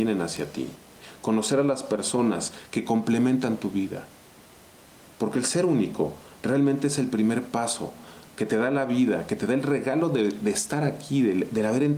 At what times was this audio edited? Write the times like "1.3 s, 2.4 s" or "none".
none